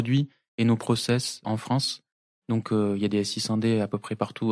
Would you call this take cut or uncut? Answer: cut